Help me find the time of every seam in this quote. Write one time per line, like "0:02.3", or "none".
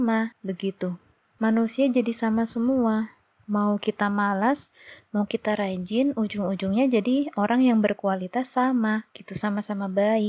none

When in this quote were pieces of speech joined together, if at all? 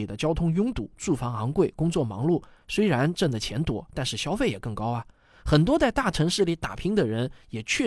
none

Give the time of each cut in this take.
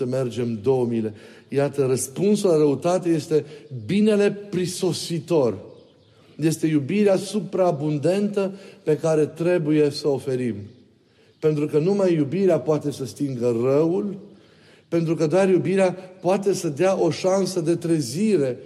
none

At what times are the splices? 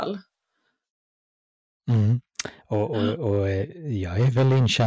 0:02.6

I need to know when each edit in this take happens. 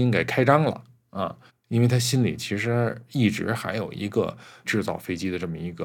0:01.5
0:04.6

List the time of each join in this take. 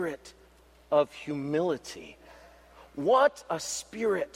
none

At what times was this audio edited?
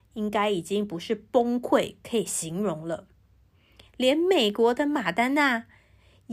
none

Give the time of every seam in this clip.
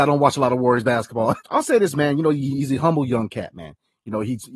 0:01.4

